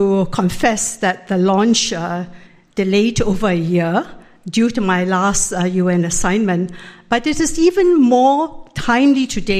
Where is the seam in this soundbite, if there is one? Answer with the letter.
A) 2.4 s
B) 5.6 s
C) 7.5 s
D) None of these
D